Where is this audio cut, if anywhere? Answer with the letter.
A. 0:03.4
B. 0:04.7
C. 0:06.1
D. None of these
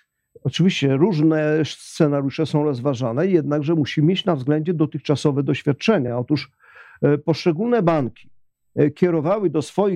D